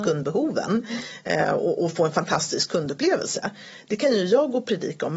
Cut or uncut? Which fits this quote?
uncut